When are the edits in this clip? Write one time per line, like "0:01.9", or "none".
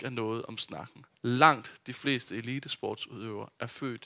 0:01.1